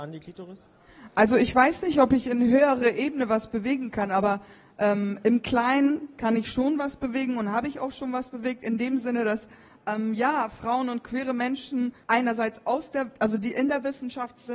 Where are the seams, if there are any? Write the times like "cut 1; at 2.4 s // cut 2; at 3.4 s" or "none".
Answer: cut 1; at 12.0 s